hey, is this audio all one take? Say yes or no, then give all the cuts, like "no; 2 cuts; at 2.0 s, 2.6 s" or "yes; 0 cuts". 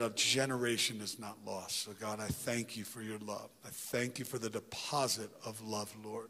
yes; 0 cuts